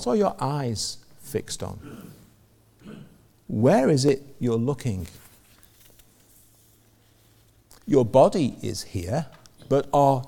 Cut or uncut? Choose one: uncut